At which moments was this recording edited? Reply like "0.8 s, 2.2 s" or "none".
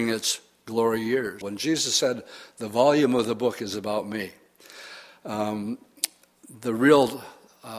1.4 s